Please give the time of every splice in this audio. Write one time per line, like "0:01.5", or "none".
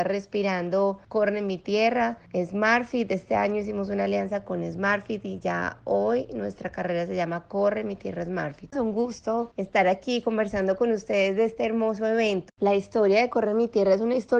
0:08.7
0:12.5